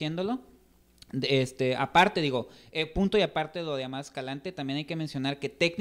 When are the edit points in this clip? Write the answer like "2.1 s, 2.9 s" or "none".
none